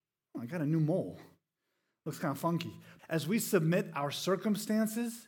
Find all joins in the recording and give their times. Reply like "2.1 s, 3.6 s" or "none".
3.0 s